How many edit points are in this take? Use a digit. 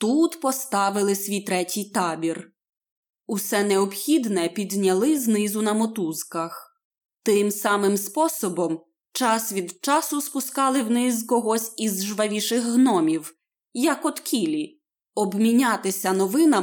0